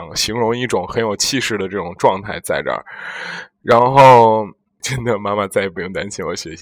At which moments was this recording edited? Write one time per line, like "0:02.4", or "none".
0:04.8